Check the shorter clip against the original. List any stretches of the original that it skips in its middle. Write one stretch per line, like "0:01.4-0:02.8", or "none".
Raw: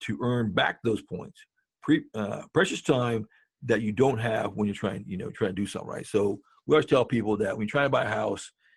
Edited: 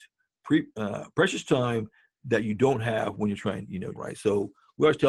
0:05.3-0:05.8